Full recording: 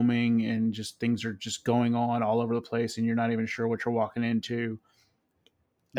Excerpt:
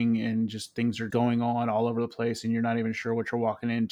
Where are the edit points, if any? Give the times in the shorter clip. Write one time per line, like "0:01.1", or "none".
0:01.1